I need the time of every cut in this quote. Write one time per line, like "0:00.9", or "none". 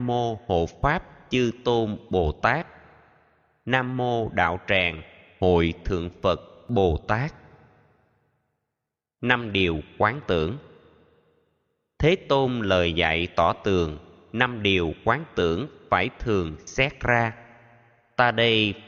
none